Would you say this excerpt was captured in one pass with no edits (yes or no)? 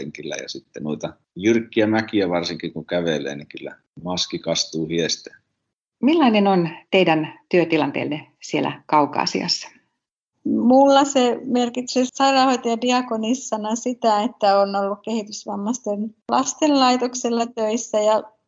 no